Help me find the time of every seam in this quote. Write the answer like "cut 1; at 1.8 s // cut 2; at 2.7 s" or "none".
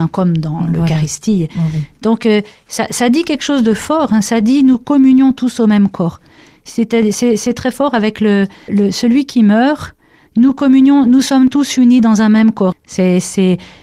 cut 1; at 8.7 s // cut 2; at 10.3 s // cut 3; at 12.7 s